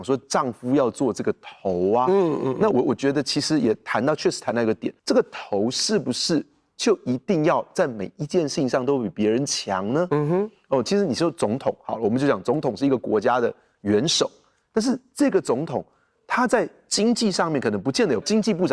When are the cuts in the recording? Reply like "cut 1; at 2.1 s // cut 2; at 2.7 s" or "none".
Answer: cut 1; at 2.7 s // cut 2; at 5.0 s